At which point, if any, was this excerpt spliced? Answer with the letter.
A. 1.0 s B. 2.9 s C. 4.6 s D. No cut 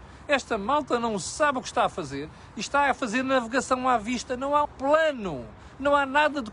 C